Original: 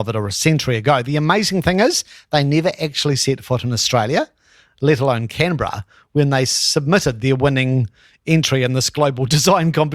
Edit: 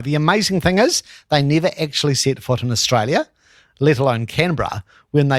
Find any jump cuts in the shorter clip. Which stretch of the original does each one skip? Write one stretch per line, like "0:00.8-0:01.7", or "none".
none